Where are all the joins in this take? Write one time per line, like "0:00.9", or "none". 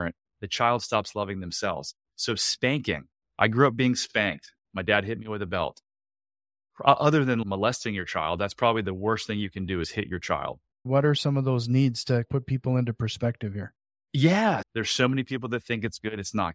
0:10.9
0:14.6